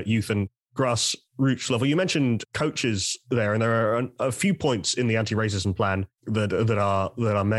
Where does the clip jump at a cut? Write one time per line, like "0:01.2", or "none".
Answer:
0:06.2

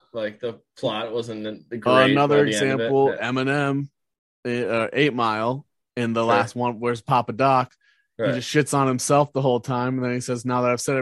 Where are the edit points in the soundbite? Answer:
none

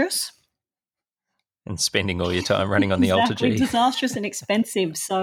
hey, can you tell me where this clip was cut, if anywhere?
none

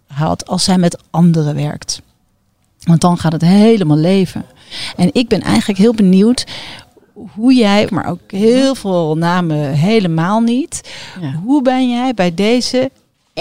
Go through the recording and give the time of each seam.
0:07.9

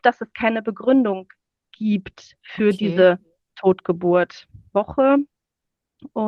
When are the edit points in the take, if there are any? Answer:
0:04.7

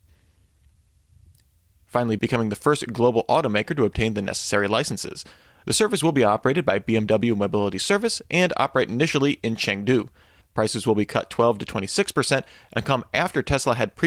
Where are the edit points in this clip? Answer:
0:02.2
0:10.4

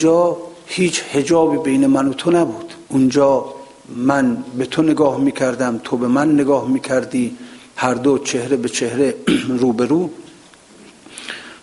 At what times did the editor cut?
0:02.9

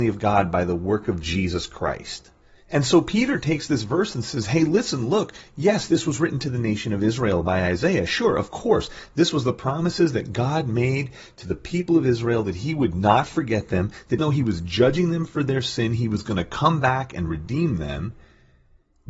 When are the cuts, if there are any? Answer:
0:14.2

